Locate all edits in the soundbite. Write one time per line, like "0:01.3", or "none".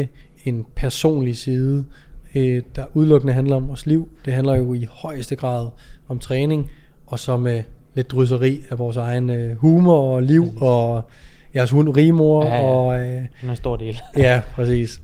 none